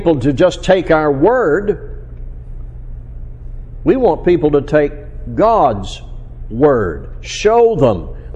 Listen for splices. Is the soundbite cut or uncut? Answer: uncut